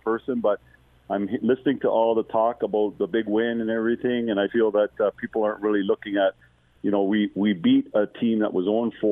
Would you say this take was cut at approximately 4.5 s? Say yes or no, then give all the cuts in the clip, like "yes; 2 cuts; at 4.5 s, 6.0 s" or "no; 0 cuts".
yes; 1 cut; at 4.5 s